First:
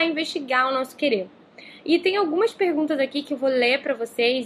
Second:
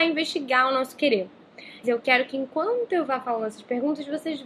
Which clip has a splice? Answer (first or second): second